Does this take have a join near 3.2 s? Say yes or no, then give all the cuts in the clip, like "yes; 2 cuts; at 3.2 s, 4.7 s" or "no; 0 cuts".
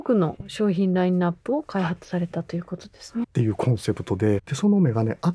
yes; 2 cuts; at 3.2 s, 4.4 s